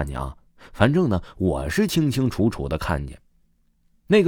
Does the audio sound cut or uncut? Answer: uncut